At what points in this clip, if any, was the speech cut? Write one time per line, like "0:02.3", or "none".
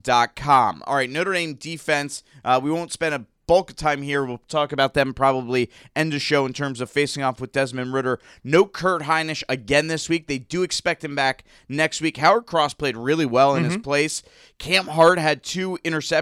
none